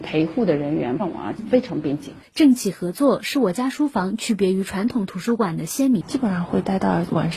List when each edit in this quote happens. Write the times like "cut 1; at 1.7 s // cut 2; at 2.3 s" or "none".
cut 1; at 6.0 s